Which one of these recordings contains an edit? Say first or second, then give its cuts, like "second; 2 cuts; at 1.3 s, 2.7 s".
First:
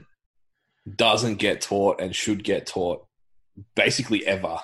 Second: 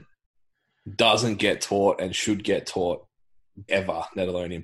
second; 1 cut; at 3.7 s